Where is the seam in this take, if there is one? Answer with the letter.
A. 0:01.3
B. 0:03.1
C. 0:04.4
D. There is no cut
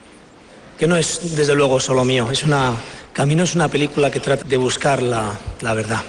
C